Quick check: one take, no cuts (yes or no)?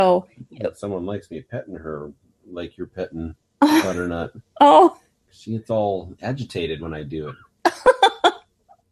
yes